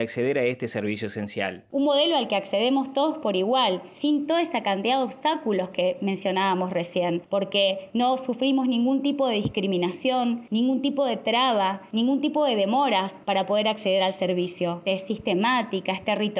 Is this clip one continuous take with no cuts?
no; 2 cuts; at 1.7 s, 14.9 s

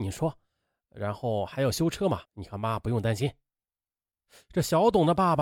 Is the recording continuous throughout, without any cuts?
no; 1 cut; at 2.3 s

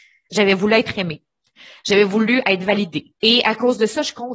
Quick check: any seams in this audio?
yes; 1 cut; at 3.2 s

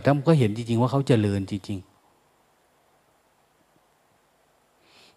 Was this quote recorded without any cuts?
yes; 0 cuts

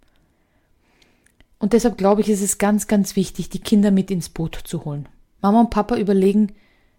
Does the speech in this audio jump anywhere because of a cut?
yes; 1 cut; at 5.4 s

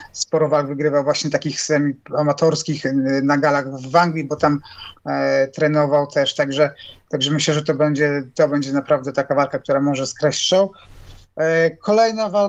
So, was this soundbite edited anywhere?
no; 0 cuts

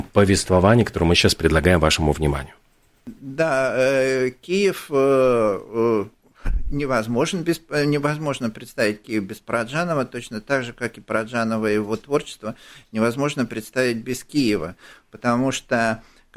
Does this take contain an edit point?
no; 0 cuts

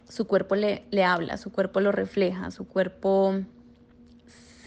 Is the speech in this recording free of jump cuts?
yes; 0 cuts

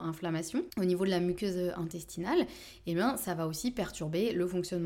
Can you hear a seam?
no; 0 cuts

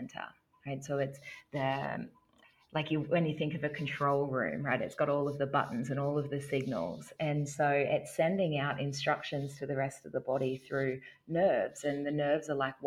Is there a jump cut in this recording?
no; 0 cuts

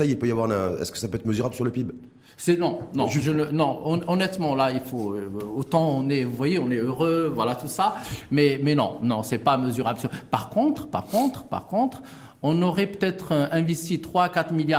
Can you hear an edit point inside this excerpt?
no; 0 cuts

